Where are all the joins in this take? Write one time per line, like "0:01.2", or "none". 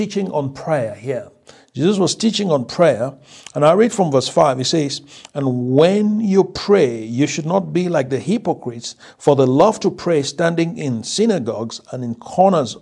none